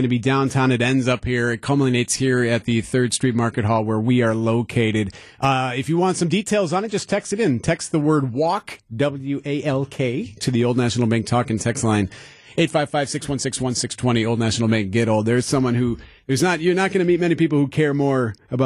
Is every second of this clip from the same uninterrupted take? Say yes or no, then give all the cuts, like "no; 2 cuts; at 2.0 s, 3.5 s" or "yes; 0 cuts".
yes; 0 cuts